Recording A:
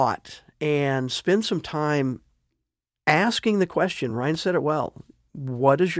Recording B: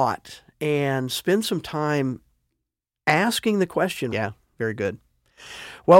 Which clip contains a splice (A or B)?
B